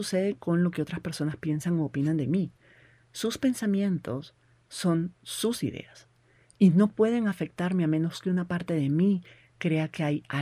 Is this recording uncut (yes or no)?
yes